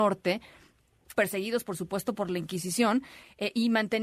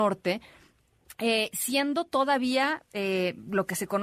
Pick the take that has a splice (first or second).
first